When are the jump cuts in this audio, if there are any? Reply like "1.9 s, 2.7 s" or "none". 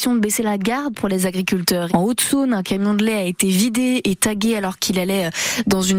1.9 s